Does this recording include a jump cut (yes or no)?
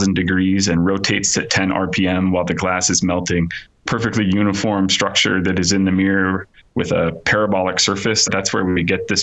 yes